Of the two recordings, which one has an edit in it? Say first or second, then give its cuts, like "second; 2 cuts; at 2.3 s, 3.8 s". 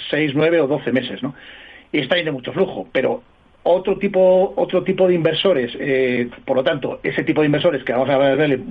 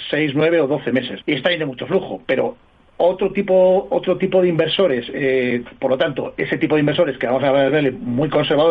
second; 1 cut; at 1.2 s